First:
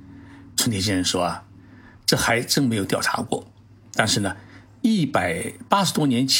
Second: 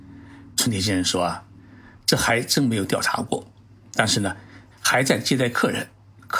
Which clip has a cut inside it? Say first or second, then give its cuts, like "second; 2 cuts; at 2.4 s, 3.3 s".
second; 1 cut; at 4.7 s